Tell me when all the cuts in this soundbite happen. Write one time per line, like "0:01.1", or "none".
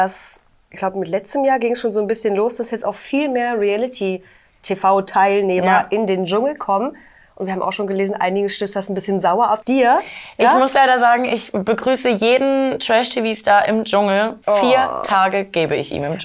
0:09.6
0:14.4